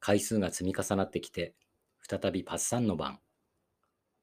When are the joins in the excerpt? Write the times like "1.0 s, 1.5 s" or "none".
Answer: none

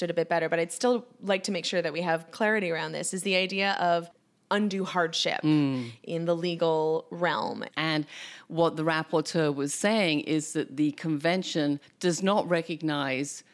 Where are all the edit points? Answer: 7.7 s

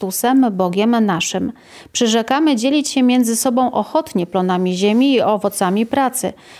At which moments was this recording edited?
1.9 s

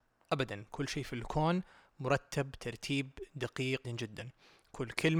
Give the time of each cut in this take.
3.8 s

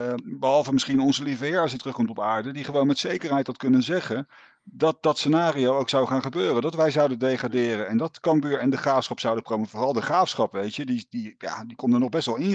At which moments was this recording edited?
none

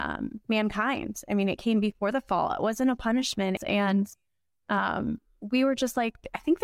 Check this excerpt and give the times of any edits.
3.6 s

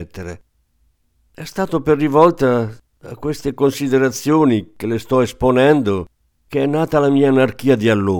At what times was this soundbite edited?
none

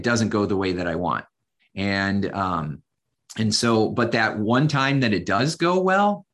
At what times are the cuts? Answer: 1.6 s

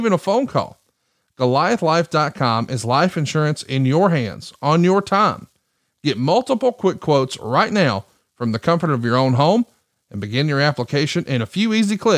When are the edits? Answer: none

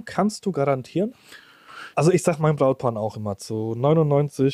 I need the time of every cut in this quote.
1.9 s

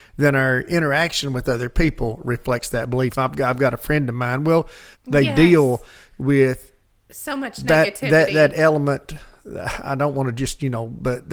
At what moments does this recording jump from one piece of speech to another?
4.9 s

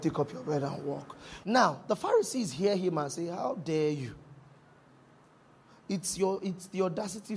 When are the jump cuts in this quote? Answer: 1.4 s

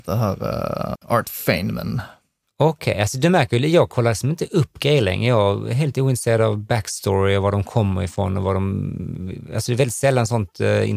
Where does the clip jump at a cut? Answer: 1.0 s

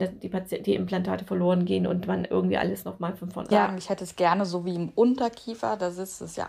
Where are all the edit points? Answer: 3.5 s

